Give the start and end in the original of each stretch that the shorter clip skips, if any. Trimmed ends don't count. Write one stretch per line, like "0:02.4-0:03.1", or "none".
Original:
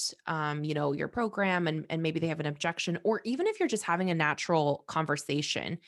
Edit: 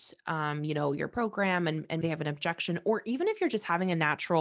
0:02.0-0:02.2